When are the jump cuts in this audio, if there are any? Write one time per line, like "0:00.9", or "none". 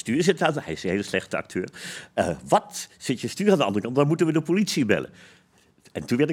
none